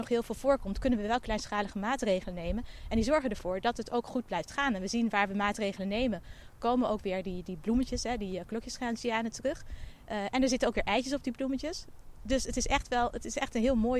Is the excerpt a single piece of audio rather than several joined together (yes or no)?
yes